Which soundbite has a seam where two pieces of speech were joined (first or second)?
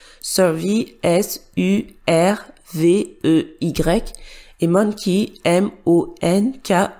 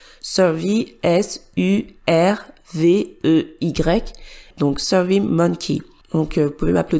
second